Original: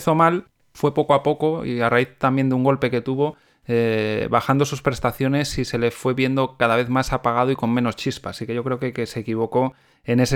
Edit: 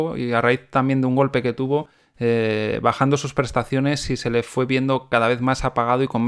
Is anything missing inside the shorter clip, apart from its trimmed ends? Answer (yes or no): no